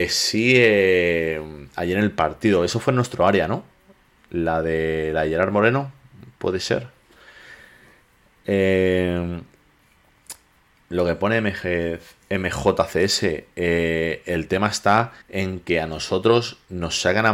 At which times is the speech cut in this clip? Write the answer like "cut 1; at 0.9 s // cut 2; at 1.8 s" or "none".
cut 1; at 15.2 s